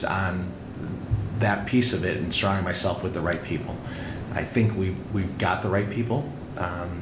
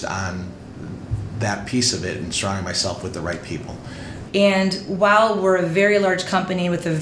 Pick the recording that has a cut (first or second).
second